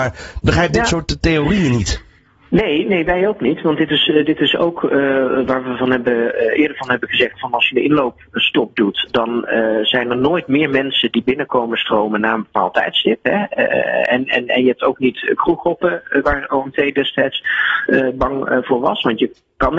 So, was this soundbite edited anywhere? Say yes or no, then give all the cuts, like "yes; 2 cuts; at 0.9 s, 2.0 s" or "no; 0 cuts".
no; 0 cuts